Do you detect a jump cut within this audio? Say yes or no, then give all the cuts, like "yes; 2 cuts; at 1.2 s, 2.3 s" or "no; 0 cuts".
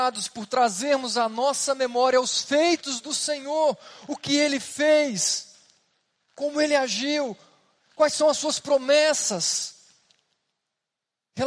no; 0 cuts